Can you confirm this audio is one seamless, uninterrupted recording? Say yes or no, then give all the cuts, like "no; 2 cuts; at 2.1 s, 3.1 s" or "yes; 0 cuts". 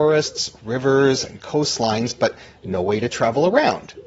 yes; 0 cuts